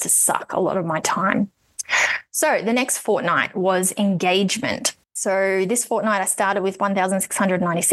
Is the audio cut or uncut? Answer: cut